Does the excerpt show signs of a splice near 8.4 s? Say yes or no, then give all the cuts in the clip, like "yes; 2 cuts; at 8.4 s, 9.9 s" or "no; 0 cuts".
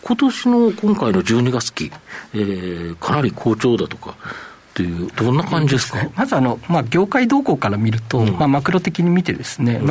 no; 1 cut; at 5.1 s